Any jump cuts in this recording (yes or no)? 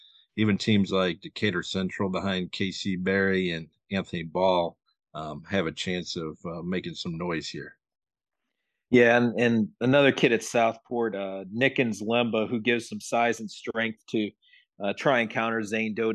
no